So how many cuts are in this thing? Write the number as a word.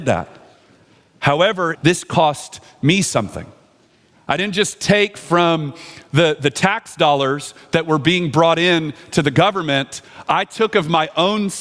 one